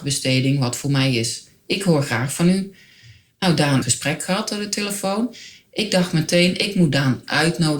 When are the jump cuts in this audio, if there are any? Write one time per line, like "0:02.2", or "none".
0:03.8

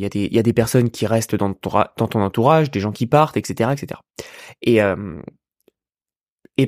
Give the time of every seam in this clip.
none

